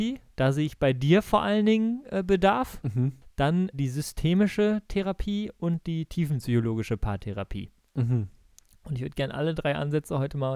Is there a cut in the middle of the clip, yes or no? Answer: yes